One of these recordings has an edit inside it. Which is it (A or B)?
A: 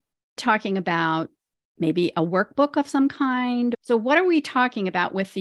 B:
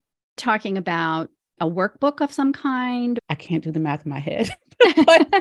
B